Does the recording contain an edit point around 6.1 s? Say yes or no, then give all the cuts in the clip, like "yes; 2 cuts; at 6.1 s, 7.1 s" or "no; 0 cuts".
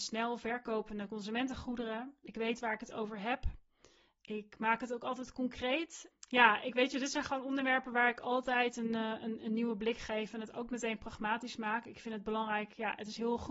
yes; 1 cut; at 6.1 s